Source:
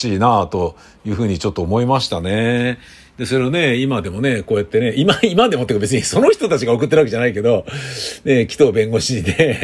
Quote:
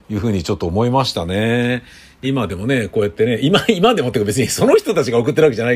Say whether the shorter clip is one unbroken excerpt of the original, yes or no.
no